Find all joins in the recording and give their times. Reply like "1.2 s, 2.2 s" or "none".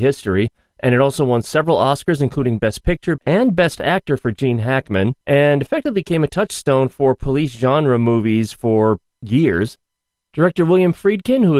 3.2 s, 5.2 s, 10.2 s